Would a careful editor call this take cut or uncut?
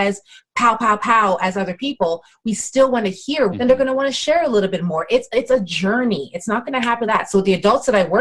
cut